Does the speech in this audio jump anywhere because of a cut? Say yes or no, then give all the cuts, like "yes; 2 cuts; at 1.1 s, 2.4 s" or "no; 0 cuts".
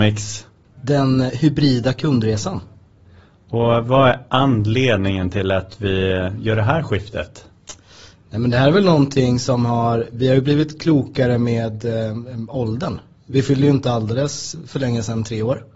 no; 0 cuts